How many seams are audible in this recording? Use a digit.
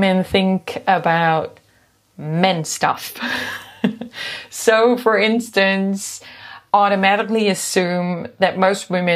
0